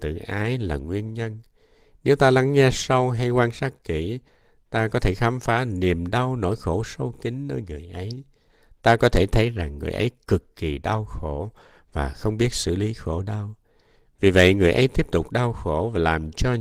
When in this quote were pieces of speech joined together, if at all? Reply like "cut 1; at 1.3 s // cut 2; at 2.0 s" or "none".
none

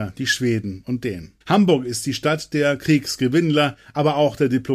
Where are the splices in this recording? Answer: cut 1; at 1.4 s

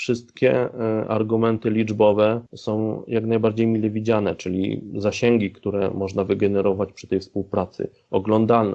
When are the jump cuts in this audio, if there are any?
cut 1; at 2.5 s

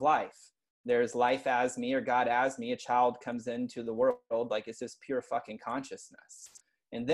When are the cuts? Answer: none

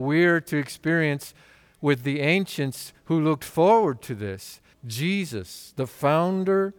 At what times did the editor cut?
cut 1; at 4.7 s

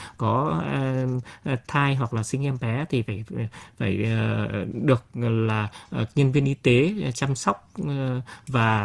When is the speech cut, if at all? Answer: none

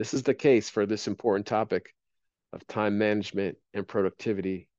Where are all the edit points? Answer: none

